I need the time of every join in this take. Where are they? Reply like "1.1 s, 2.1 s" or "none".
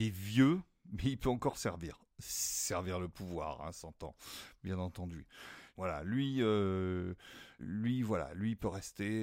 5.8 s, 7.6 s